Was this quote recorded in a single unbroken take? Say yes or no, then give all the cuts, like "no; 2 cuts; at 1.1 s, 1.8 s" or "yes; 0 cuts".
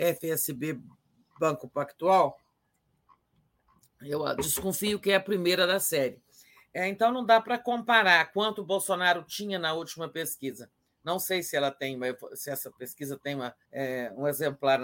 no; 1 cut; at 13.6 s